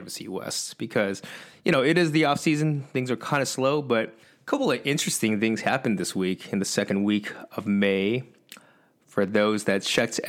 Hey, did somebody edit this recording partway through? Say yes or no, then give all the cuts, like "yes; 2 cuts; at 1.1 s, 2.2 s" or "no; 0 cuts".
no; 0 cuts